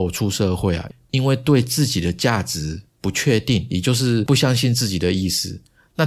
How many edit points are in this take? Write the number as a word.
zero